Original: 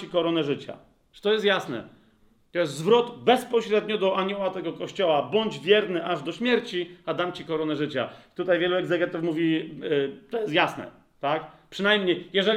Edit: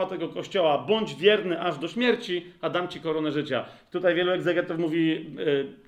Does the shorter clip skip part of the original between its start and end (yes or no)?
no